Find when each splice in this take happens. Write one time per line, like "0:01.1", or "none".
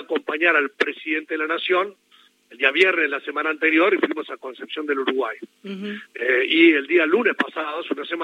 none